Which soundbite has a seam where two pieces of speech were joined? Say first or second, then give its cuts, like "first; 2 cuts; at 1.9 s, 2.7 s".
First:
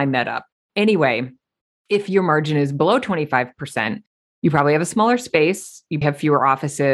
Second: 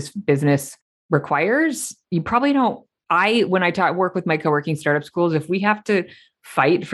first; 1 cut; at 6.0 s